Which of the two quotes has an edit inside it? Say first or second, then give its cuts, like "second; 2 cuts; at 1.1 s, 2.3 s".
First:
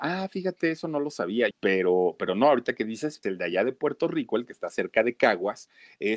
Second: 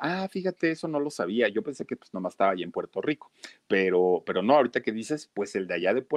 first; 2 cuts; at 1.5 s, 3.2 s